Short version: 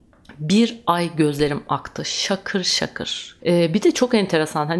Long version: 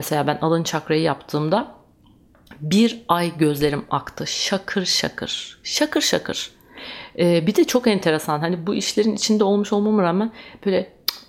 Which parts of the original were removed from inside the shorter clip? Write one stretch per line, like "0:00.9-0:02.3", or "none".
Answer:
0:05.6-0:07.1